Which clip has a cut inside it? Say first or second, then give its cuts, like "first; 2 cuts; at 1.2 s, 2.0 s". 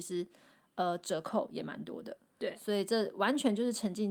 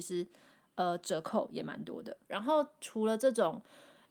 second; 1 cut; at 2.2 s